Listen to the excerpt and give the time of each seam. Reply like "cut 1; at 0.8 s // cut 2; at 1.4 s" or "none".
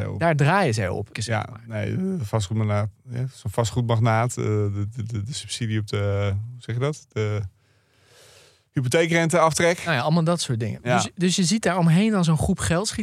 cut 1; at 1.1 s